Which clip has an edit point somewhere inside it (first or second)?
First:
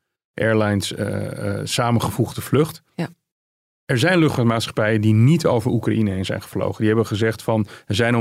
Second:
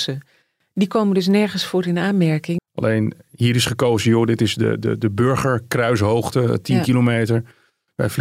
second